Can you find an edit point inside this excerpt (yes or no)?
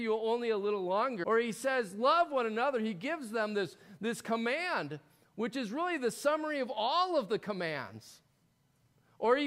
yes